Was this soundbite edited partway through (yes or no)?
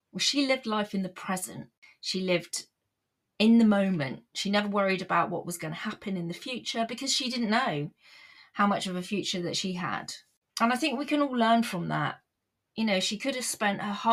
no